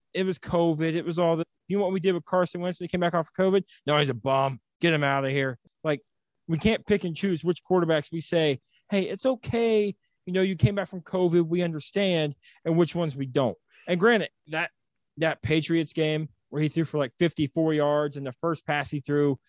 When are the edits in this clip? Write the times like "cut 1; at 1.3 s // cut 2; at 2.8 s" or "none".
cut 1; at 5.7 s